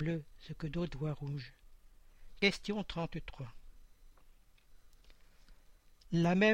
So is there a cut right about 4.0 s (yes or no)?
no